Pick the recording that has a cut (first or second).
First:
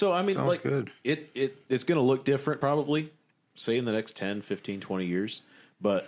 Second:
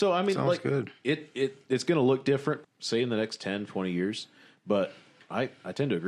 second